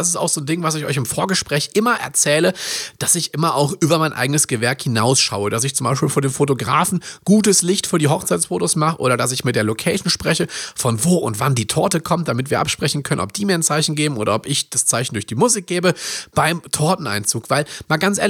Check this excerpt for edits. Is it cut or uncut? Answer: uncut